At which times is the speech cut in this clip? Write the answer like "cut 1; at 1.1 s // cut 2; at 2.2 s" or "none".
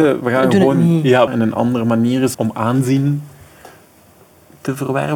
cut 1; at 1.3 s // cut 2; at 2.3 s

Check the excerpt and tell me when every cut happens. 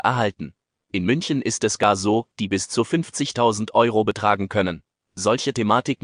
cut 1; at 2.3 s // cut 2; at 5.0 s

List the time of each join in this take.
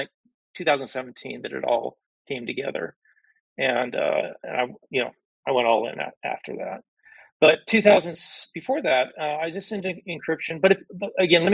none

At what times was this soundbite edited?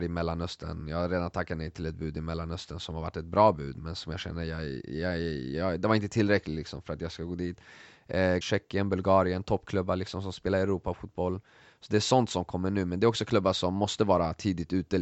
cut 1; at 8.4 s

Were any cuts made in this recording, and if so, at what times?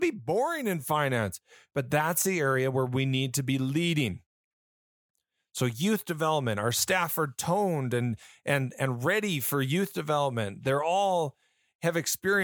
cut 1; at 1.7 s

